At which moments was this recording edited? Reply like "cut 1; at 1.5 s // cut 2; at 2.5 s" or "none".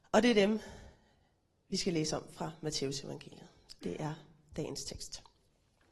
none